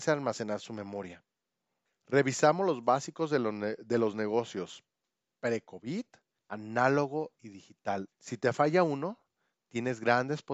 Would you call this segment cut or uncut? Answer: cut